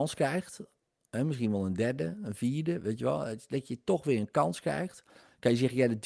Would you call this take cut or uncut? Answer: cut